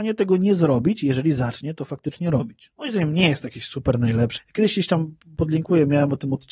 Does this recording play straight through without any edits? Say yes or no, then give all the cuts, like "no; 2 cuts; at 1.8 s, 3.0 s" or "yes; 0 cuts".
no; 2 cuts; at 2.7 s, 4.4 s